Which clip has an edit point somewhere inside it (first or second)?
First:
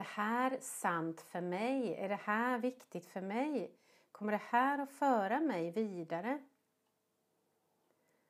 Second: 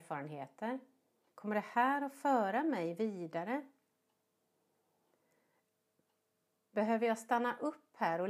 second